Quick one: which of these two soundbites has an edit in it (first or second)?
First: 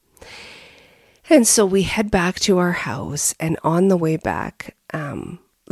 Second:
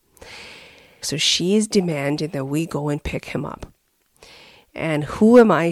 second